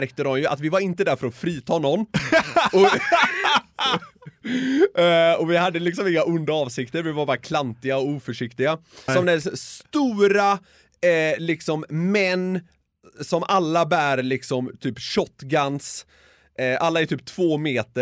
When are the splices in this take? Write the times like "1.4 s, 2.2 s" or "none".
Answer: 9.1 s